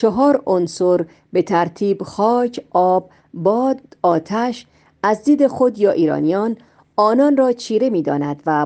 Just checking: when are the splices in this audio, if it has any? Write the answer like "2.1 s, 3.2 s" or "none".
none

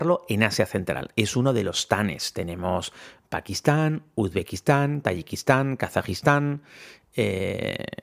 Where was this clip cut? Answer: 5.0 s

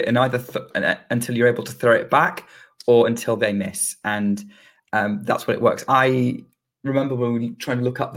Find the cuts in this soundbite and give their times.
5.9 s

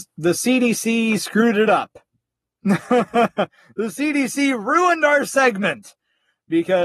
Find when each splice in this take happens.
none

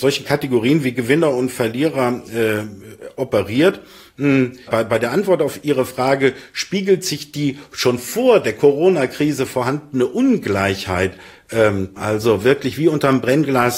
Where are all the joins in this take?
4.7 s, 12.0 s

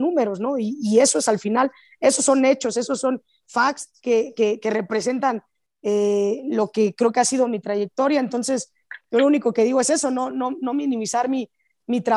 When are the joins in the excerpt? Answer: none

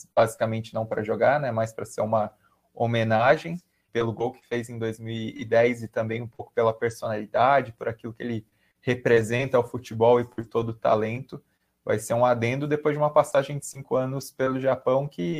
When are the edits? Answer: 3.9 s

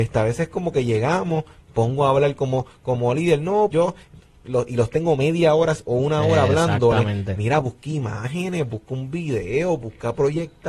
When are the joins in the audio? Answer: 3.7 s

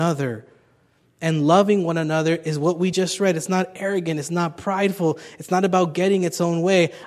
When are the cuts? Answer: none

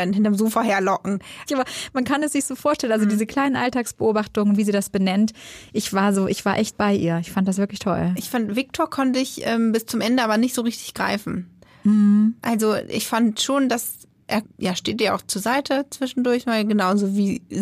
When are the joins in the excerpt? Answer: 1.5 s

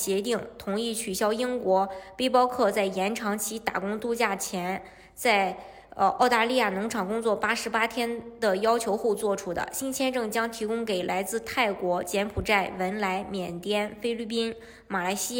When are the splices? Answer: none

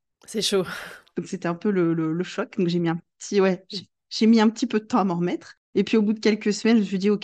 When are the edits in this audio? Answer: none

